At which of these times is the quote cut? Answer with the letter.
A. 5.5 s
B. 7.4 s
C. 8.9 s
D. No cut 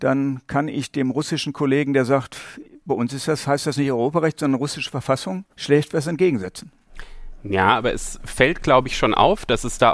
A